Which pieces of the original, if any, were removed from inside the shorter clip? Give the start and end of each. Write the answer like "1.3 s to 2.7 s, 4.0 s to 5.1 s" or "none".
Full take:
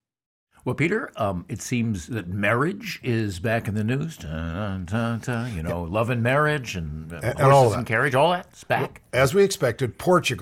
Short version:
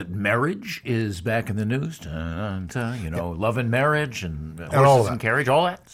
4.9 s to 5.2 s, 7.2 s to 7.3 s